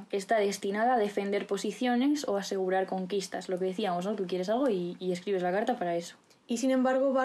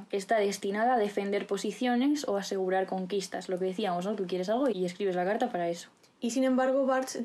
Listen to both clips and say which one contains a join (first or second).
second